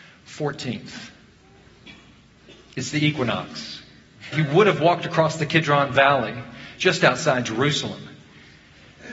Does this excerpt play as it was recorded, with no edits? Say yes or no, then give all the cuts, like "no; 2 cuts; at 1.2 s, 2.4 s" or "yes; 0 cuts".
no; 1 cut; at 4.3 s